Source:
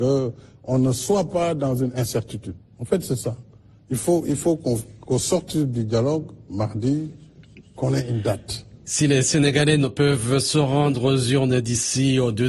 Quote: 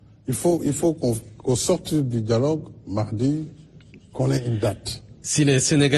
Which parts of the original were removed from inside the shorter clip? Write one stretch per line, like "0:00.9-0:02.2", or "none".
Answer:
none